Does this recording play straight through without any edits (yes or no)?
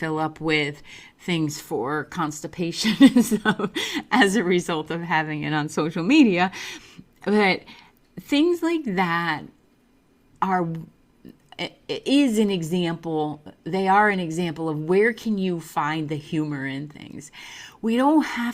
yes